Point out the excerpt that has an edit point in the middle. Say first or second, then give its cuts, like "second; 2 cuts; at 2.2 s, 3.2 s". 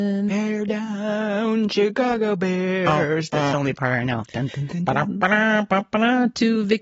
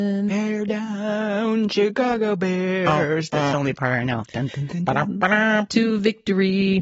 second; 1 cut; at 5.7 s